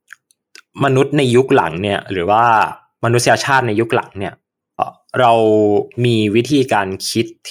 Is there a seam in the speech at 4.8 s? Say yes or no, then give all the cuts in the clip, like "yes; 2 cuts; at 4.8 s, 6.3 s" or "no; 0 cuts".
yes; 1 cut; at 4.8 s